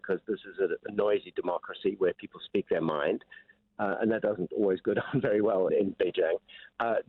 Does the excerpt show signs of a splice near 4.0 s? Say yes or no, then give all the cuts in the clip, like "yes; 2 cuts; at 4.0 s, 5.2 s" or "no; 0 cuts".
no; 1 cut; at 5.7 s